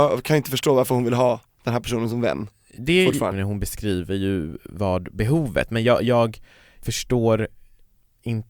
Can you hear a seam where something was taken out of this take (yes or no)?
yes